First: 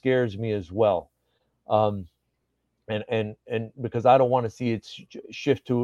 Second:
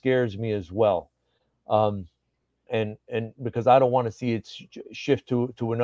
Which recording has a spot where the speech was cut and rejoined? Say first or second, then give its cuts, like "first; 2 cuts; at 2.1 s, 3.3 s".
second; 1 cut; at 2.7 s